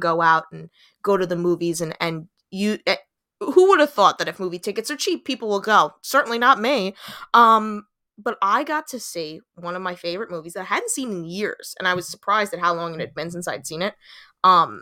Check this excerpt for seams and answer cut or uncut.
uncut